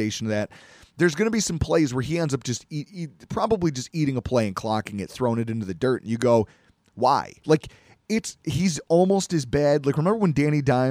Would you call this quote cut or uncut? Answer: cut